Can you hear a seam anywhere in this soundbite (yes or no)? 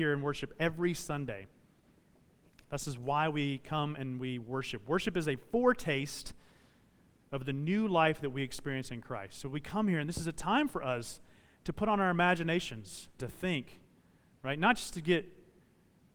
yes